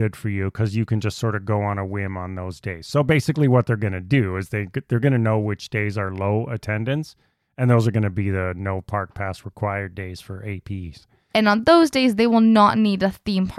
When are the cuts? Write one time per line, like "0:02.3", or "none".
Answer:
0:11.3